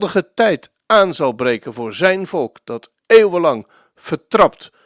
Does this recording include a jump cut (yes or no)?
no